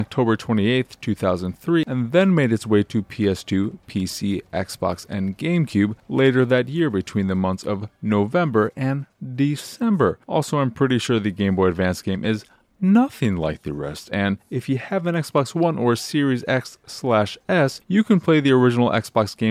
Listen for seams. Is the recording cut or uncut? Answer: uncut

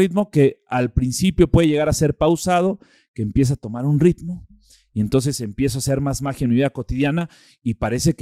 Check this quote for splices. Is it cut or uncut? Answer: uncut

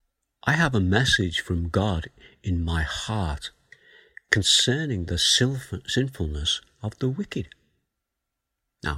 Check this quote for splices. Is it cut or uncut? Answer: uncut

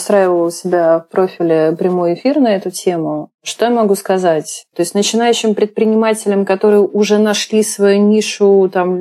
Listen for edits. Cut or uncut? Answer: cut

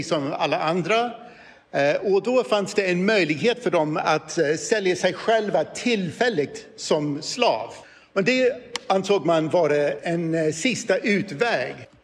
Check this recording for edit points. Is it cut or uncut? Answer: uncut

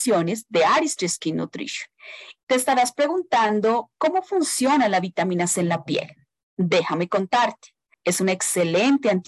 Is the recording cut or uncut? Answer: cut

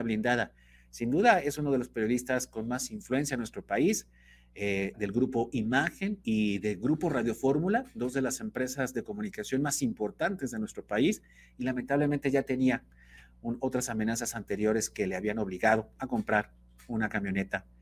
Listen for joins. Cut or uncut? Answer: cut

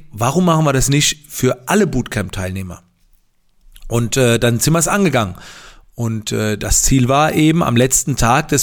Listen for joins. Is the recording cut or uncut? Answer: uncut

